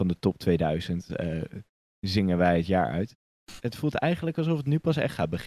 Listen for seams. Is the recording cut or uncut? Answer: cut